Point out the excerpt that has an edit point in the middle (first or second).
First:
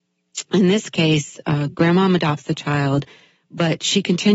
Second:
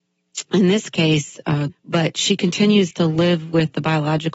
second